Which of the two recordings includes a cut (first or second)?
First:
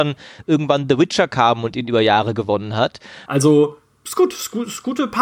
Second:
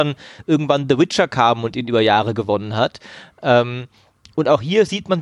first